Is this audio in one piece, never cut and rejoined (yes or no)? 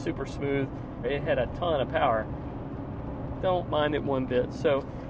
no